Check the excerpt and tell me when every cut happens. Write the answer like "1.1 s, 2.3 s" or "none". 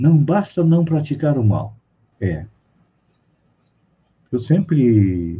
2.1 s